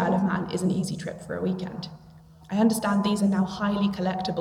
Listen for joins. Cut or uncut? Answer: cut